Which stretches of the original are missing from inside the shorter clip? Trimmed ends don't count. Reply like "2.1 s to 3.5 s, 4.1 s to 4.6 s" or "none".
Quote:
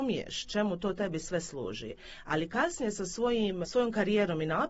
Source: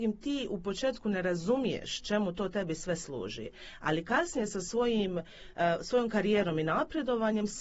5.2 s to 5.8 s